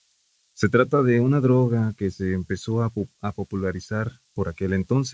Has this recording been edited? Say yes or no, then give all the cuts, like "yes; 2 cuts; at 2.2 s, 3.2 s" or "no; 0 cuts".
no; 0 cuts